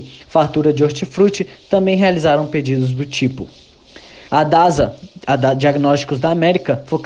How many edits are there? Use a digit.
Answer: 1